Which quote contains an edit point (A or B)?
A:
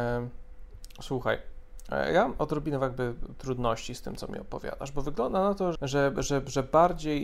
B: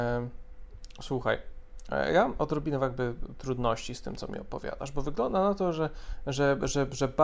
A